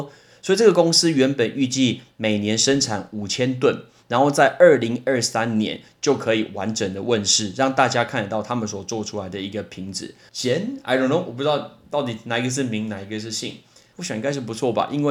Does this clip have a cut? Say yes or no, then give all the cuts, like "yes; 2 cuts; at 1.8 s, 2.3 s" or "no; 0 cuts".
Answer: yes; 2 cuts; at 10.3 s, 13.9 s